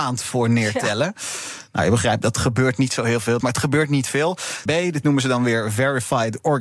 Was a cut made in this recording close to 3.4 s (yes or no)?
yes